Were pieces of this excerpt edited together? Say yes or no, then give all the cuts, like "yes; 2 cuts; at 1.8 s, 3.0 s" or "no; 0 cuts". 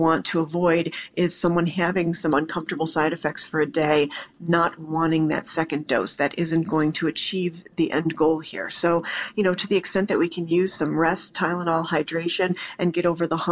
no; 0 cuts